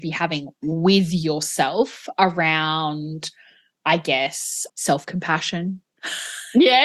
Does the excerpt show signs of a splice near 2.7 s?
no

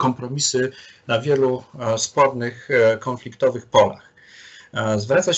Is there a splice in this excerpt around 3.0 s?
no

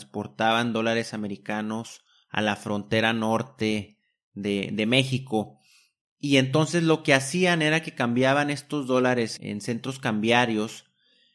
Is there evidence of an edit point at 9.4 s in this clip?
yes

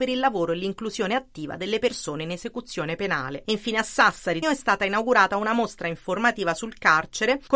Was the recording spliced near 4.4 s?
yes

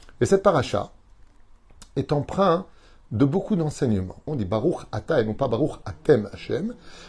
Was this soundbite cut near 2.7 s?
no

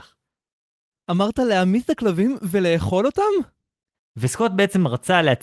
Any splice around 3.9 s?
yes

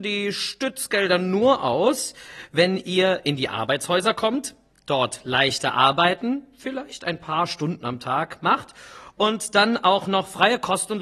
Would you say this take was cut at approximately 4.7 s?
no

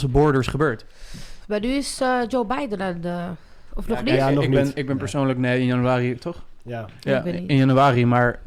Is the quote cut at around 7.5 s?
no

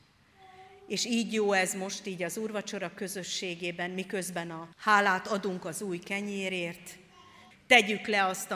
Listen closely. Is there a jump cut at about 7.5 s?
yes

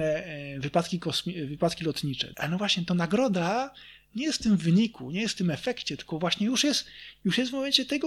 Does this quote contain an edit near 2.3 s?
yes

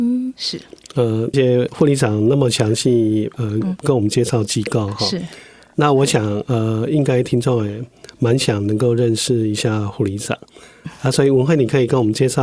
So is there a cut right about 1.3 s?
yes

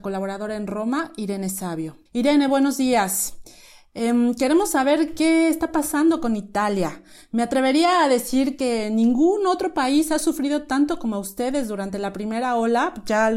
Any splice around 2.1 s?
yes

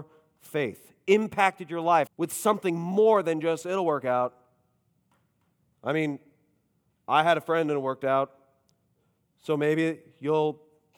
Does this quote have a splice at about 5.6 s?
no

